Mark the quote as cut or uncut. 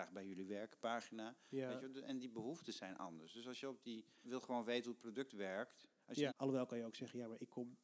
cut